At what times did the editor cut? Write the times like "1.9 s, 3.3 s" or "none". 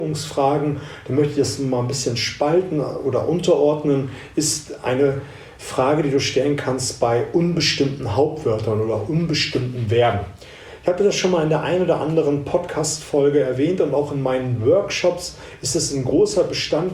none